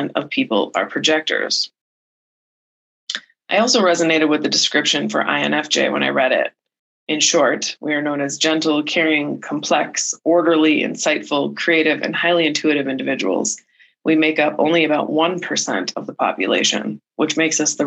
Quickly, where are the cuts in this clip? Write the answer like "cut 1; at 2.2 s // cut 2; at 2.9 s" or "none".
none